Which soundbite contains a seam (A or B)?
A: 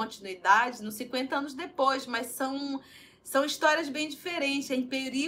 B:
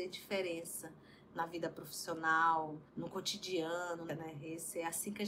B